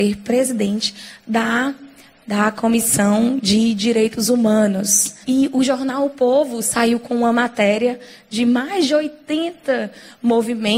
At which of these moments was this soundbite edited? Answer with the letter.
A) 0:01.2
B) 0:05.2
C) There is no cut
B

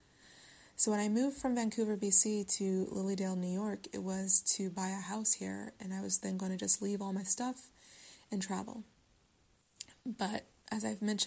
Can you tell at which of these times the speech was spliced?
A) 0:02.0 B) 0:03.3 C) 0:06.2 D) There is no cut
D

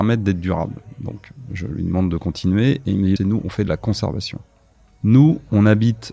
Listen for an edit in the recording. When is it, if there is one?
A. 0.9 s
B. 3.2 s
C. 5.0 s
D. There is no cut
B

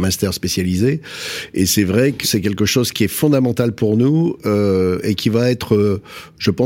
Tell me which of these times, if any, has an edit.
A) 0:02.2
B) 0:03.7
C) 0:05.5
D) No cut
A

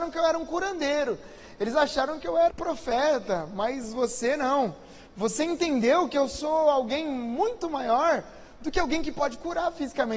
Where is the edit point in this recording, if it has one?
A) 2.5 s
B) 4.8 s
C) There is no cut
A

